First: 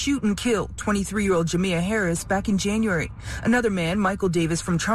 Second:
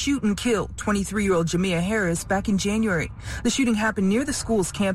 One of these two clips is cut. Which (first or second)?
second